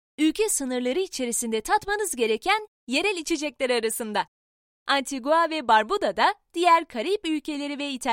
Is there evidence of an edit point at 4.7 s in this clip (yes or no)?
yes